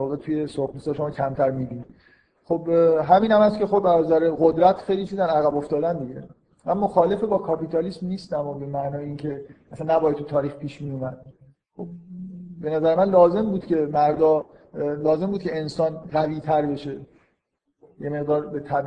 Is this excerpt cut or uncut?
uncut